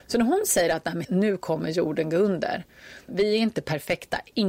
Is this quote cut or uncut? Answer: cut